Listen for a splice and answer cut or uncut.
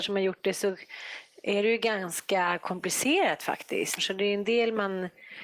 cut